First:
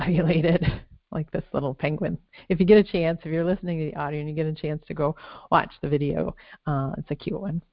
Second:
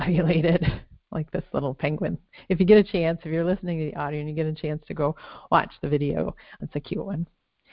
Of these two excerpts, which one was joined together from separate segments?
second; 1 cut; at 6.6 s

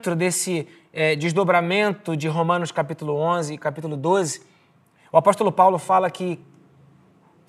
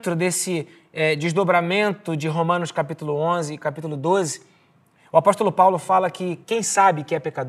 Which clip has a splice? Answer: second; 1 cut; at 6.4 s

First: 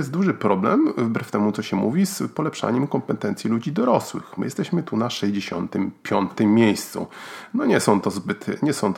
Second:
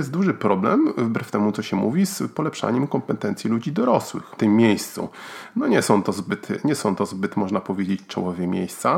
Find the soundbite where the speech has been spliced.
second; 1 cut; at 4.4 s

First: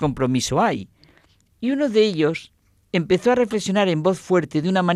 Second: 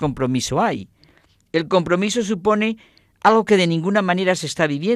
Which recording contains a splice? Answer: first; 1 cut; at 1.5 s

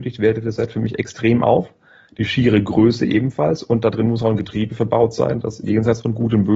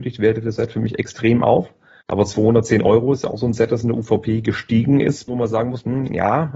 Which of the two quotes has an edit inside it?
second; 2 cuts; at 2.0 s, 5.3 s

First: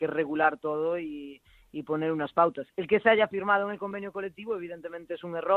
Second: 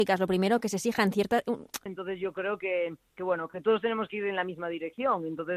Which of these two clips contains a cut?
second; 1 cut; at 1.9 s

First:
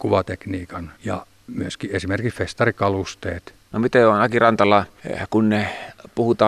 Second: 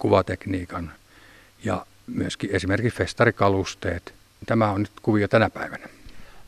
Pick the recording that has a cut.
first; 2 cuts; at 1.0 s, 3.7 s

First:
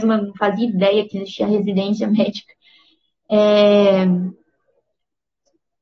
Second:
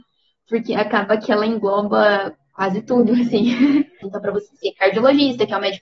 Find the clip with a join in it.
second; 1 cut; at 4.0 s

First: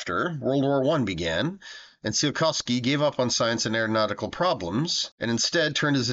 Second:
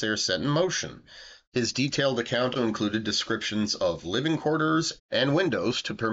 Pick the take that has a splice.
second; 3 cuts; at 1.4 s, 2.5 s, 5.0 s

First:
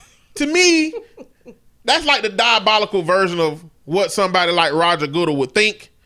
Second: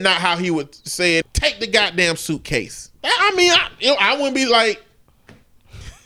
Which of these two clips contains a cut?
second; 2 cuts; at 1.2 s, 2.9 s

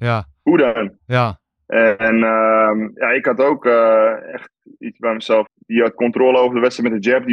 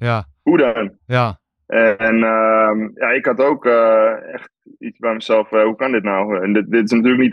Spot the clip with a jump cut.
first; 1 cut; at 5.5 s

